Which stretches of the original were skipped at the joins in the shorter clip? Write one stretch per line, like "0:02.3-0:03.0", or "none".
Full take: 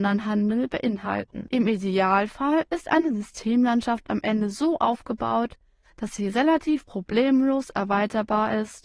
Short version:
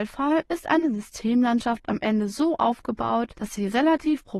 0:05.5-0:05.9